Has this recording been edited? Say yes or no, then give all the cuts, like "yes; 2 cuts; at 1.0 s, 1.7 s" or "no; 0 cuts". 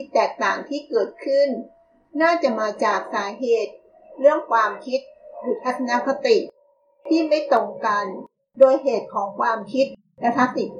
no; 0 cuts